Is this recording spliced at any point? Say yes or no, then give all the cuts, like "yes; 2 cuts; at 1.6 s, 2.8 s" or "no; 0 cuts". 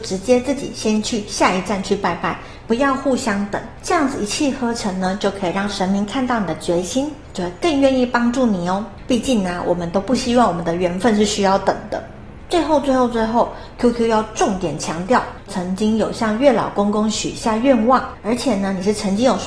yes; 1 cut; at 15.5 s